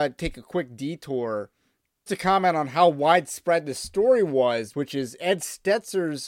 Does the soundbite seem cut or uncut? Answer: cut